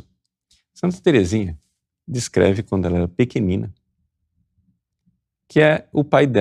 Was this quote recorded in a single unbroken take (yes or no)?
yes